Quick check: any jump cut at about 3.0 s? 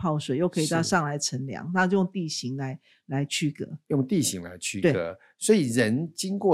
no; 0 cuts

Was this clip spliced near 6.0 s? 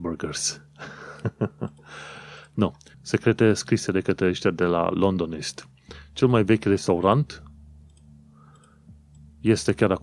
no; 1 cut; at 2.9 s

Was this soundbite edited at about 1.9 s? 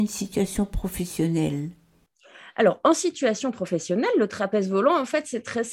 no; 0 cuts

